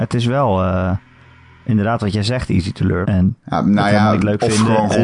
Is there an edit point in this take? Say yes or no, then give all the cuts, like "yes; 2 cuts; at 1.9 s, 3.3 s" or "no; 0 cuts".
yes; 1 cut; at 3.0 s